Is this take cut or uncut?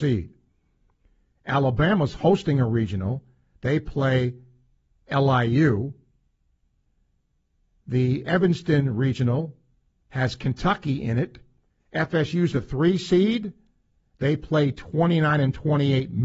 cut